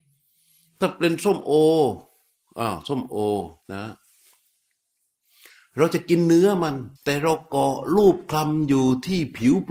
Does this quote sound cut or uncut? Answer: cut